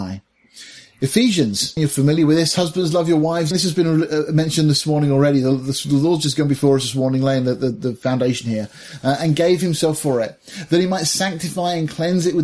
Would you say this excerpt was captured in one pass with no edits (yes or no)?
no